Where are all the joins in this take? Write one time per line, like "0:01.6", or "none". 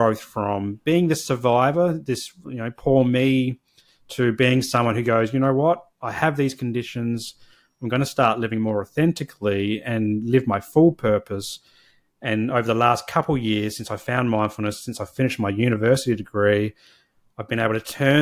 none